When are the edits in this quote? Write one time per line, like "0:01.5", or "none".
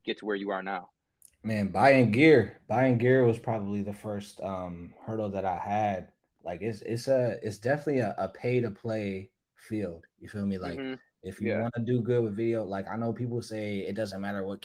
none